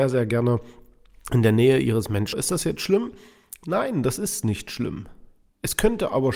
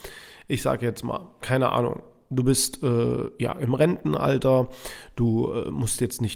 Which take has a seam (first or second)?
first